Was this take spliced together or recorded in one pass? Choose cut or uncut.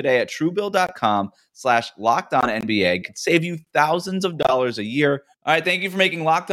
cut